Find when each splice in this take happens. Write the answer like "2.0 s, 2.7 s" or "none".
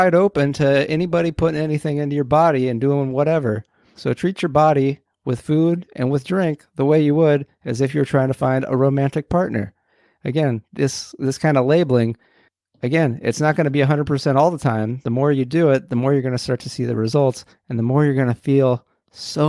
4.0 s